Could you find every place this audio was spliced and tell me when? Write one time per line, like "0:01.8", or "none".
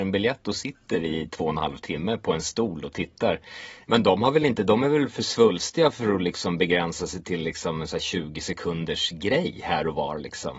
0:03.8